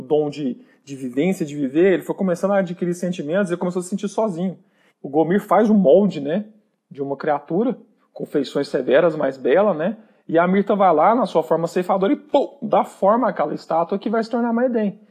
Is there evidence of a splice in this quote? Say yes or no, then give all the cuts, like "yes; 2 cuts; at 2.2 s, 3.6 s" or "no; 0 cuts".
yes; 1 cut; at 4.9 s